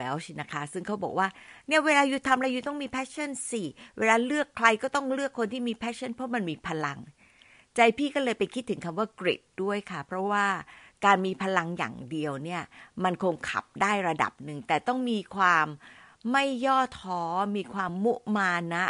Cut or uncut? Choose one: uncut